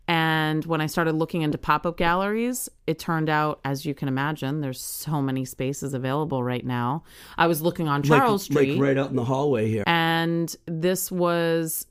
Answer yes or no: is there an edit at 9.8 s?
yes